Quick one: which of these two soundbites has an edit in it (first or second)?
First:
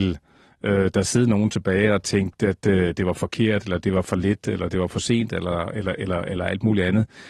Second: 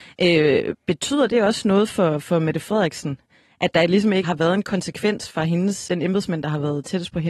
second